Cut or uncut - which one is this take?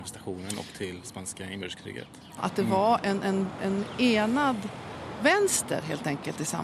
cut